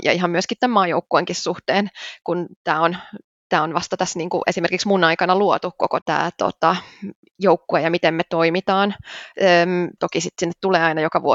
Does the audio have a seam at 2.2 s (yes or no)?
no